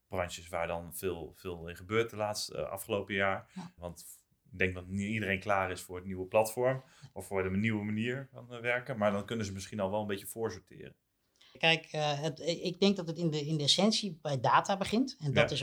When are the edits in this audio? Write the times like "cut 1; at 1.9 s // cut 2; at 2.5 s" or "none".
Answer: cut 1; at 3.8 s // cut 2; at 11.5 s